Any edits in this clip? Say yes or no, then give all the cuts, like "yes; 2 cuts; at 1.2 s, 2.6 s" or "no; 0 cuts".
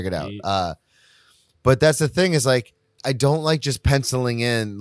yes; 1 cut; at 3.0 s